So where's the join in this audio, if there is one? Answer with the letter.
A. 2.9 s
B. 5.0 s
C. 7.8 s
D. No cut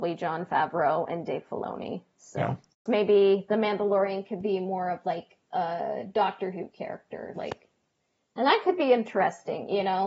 A